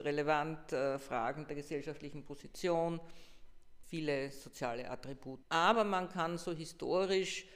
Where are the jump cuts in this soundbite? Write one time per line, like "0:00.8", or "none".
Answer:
0:03.8
0:05.4